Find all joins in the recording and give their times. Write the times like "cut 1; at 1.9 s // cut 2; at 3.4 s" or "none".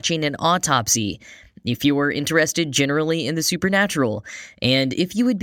none